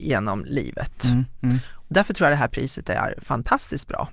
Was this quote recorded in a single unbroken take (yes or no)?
yes